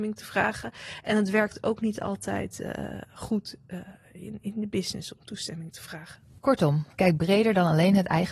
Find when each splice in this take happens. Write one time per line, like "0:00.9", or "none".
0:04.4